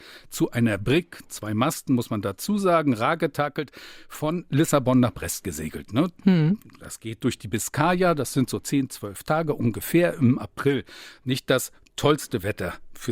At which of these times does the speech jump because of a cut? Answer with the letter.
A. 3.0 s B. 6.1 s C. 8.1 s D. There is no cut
D